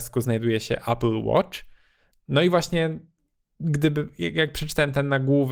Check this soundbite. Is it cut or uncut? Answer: uncut